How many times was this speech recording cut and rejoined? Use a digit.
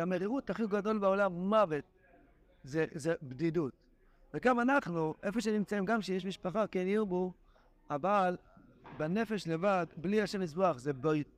0